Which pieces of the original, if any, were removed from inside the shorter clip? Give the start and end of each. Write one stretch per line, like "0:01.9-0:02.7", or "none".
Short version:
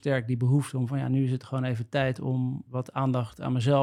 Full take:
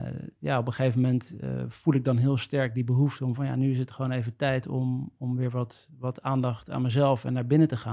0:05.1-0:06.0